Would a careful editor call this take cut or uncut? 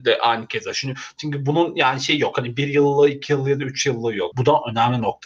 cut